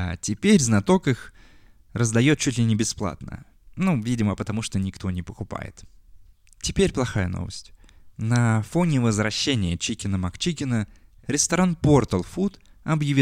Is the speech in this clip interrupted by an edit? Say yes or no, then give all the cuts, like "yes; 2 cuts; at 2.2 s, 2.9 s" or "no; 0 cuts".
yes; 1 cut; at 8.1 s